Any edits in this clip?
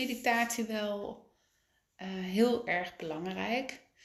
no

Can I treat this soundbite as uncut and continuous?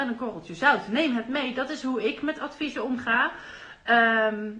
yes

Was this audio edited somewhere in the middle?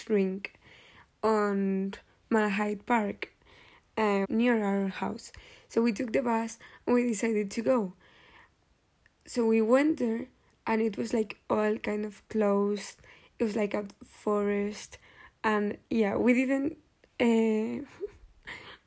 yes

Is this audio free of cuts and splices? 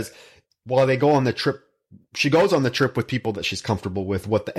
yes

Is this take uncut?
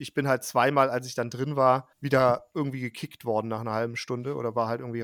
no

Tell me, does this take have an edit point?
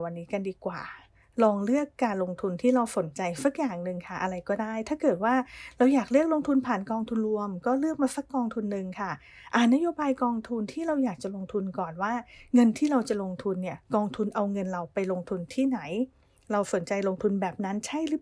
no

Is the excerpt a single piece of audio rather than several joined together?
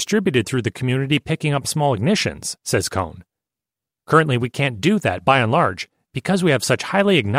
yes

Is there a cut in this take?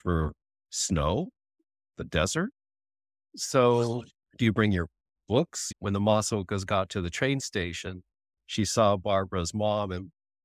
yes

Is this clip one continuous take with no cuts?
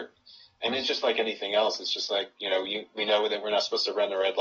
yes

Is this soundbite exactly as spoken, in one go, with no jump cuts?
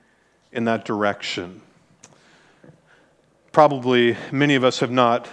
yes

